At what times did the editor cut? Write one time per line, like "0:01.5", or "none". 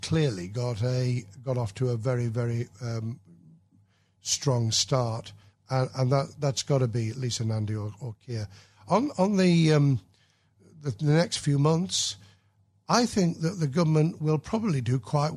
0:05.5